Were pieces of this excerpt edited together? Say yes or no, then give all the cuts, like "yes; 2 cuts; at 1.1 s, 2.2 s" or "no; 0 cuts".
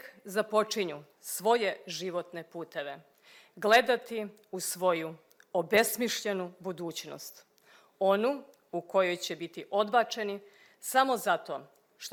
no; 0 cuts